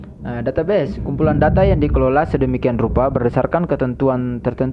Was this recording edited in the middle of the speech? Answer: no; 0 cuts

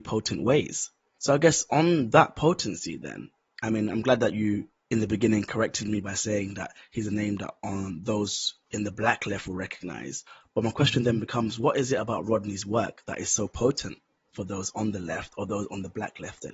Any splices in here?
no; 0 cuts

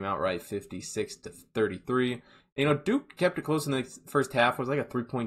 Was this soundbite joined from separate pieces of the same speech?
no; 0 cuts

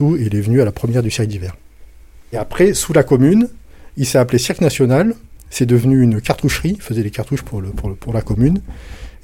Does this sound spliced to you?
no; 0 cuts

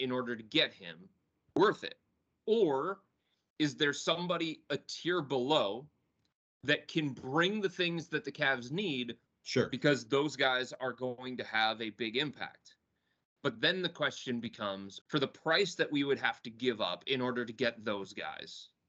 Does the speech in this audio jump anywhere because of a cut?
yes; 2 cuts; at 9.3 s, 15.0 s

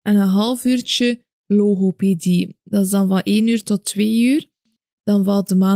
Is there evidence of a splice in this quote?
no; 0 cuts

